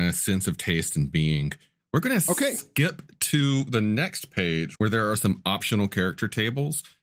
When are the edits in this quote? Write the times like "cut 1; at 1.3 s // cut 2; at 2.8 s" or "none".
cut 1; at 1.8 s // cut 2; at 4.7 s